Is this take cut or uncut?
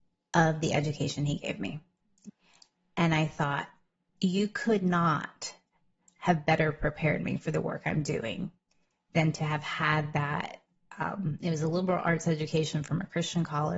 uncut